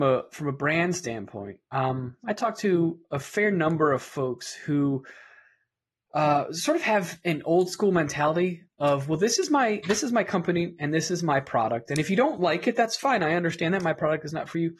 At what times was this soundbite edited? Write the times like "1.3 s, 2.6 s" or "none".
none

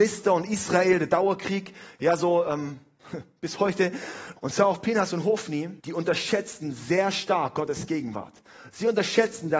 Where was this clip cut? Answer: 4.4 s, 5.8 s

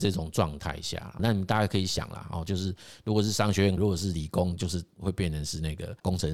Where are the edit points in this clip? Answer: 1.2 s, 3.8 s

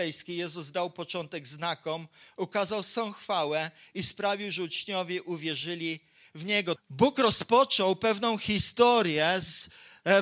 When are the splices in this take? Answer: 6.8 s

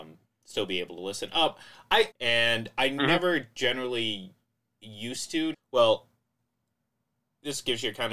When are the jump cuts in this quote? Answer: 2.1 s, 5.5 s

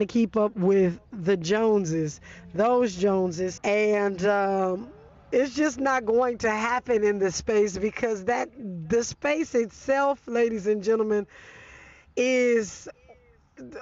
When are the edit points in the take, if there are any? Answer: 3.6 s

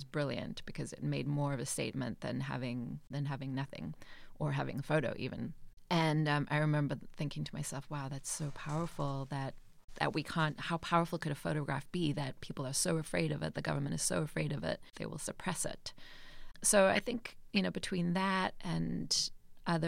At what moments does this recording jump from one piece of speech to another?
none

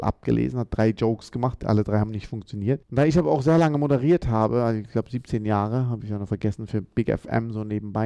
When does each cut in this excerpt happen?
2.8 s

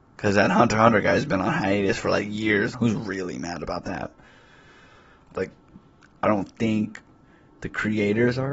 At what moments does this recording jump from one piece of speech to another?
2.7 s, 5.3 s

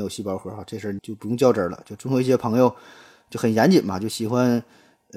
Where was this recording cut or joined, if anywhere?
1.0 s

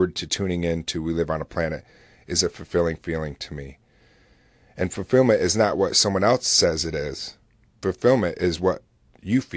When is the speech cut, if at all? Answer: none

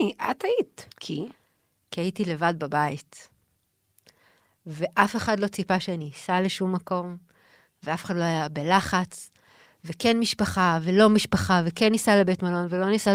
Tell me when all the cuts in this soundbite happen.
0.9 s

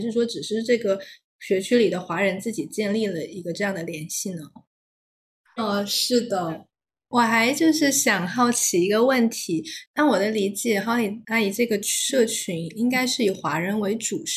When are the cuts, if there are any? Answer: 5.6 s

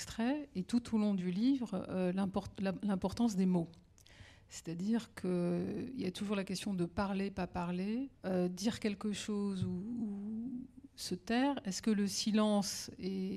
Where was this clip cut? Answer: 8.2 s

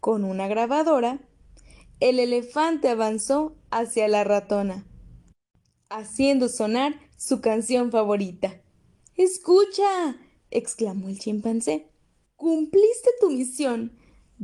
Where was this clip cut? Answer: 9.1 s, 12.2 s

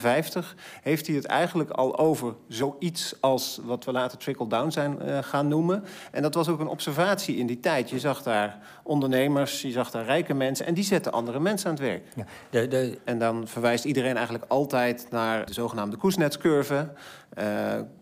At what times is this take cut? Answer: 13.1 s, 15.5 s

